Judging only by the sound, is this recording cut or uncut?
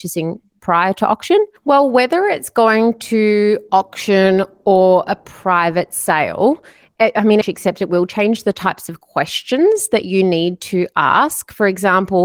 cut